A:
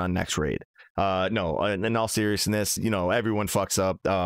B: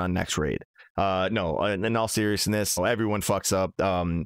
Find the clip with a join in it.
B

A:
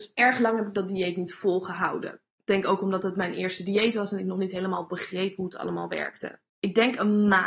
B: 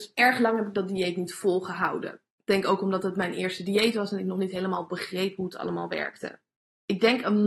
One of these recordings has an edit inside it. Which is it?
A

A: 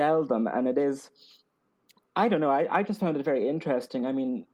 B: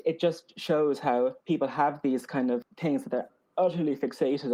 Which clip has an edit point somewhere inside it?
B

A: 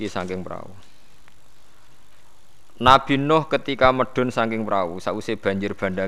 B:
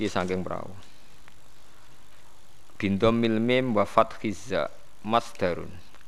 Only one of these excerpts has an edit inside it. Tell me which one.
B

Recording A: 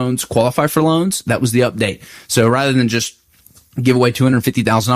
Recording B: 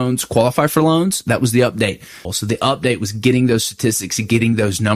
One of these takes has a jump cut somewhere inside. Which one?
B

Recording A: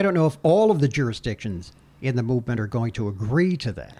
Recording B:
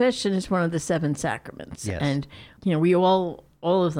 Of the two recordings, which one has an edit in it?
B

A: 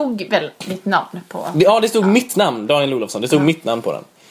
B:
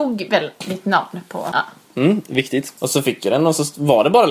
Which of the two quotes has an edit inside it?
B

